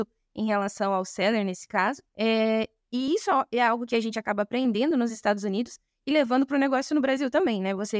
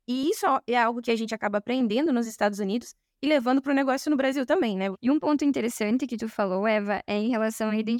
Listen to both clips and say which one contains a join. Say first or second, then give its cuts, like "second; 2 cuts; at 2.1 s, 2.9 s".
second; 1 cut; at 4.9 s